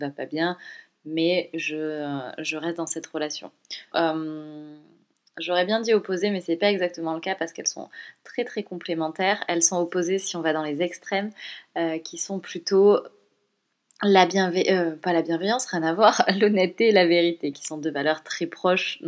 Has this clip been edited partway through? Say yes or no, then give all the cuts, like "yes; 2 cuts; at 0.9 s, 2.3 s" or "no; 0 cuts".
yes; 2 cuts; at 3.9 s, 17.5 s